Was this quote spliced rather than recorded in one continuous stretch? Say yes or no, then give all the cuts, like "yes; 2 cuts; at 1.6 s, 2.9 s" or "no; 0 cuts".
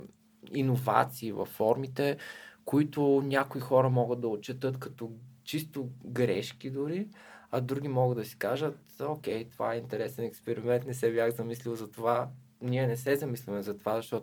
no; 0 cuts